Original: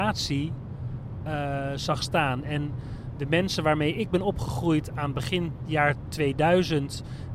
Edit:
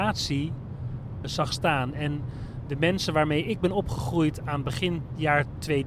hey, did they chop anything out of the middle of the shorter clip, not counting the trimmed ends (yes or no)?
yes